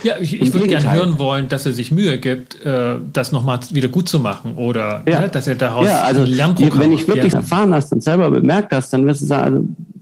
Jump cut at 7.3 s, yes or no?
yes